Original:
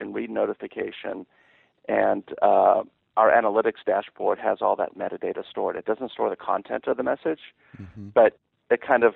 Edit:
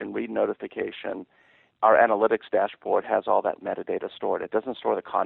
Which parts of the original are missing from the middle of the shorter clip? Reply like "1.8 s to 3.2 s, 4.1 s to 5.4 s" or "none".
1.7 s to 3.0 s